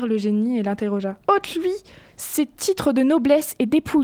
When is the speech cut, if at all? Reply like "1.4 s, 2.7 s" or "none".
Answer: 1.2 s